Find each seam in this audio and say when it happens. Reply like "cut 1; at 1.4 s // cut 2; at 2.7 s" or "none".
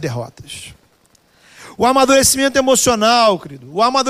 none